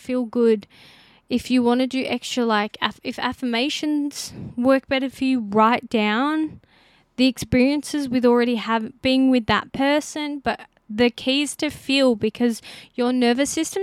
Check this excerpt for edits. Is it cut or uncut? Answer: uncut